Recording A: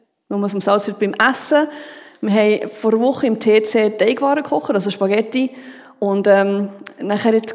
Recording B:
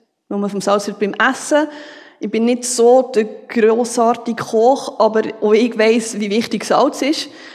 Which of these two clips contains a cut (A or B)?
A